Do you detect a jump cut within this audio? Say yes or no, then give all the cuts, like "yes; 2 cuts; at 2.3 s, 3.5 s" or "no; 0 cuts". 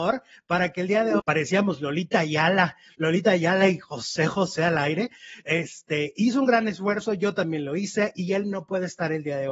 yes; 1 cut; at 1.2 s